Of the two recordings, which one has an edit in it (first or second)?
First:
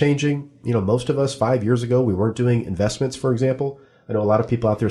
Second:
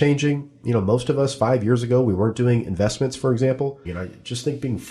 second